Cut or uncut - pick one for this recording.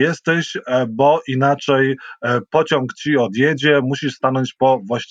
uncut